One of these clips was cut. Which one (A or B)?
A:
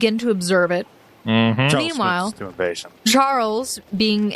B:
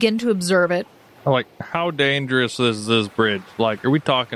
B